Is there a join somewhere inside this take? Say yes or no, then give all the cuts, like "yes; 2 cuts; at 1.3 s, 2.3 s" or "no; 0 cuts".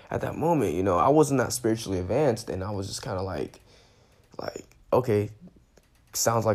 no; 0 cuts